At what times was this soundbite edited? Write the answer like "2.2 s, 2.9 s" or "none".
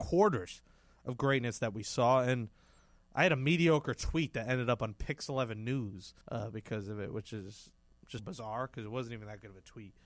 6.2 s, 8.2 s